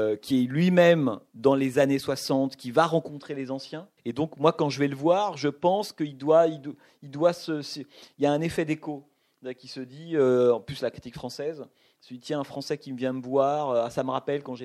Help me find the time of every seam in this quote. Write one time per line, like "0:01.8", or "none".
0:04.0